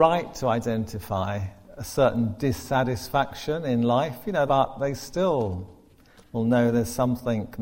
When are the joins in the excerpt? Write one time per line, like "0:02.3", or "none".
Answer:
0:04.5